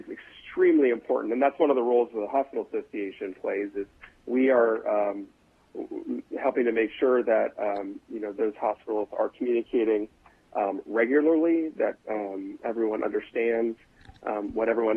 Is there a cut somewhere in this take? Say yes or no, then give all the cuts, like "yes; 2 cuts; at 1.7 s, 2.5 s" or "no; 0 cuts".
no; 0 cuts